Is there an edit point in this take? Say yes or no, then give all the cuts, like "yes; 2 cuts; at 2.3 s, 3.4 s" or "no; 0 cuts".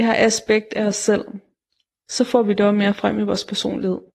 no; 0 cuts